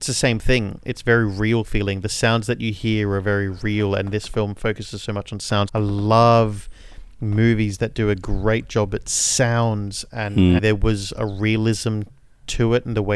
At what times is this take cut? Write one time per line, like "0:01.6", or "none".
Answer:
0:05.7
0:10.6